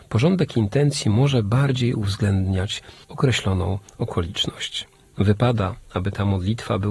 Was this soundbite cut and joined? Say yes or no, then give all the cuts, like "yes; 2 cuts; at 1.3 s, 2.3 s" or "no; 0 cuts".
yes; 1 cut; at 5.1 s